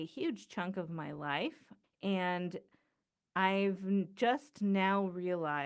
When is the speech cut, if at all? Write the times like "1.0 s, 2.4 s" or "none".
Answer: 1.8 s